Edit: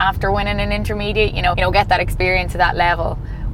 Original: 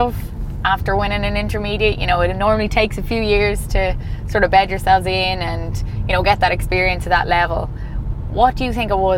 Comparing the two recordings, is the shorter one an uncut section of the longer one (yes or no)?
no